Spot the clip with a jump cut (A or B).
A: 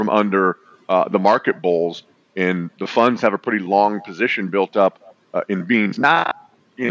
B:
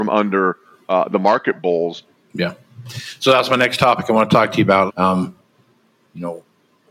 B